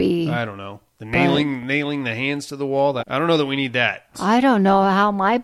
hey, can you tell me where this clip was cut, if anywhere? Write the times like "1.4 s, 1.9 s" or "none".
3.0 s, 4.1 s

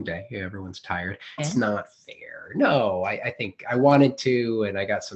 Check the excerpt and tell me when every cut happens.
1.4 s

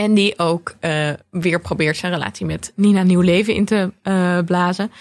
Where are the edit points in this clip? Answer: none

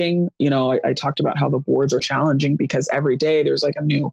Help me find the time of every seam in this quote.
2.0 s

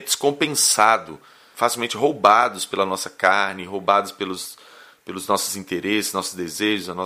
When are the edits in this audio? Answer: 1.5 s

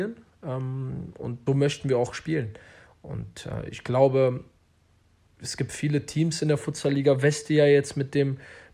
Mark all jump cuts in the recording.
1.5 s

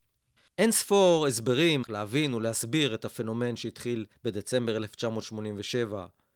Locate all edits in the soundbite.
1.8 s

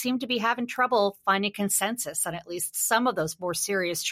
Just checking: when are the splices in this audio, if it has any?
none

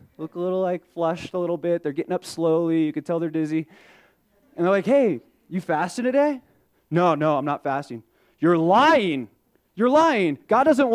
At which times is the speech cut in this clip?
none

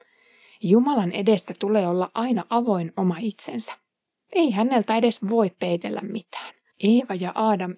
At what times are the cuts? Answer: 6.7 s

